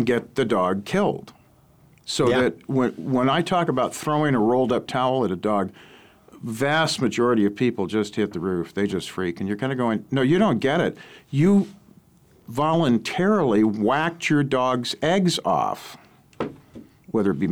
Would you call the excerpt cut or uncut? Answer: uncut